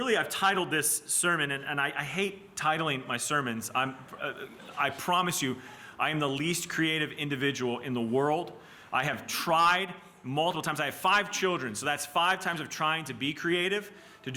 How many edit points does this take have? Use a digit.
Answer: 0